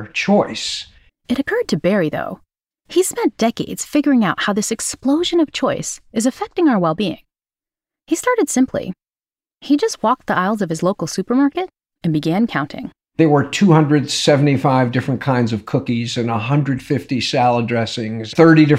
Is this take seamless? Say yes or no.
no